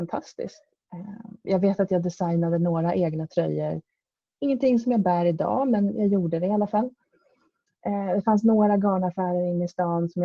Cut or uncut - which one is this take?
cut